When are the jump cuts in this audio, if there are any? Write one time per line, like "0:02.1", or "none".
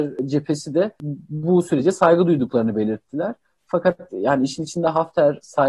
none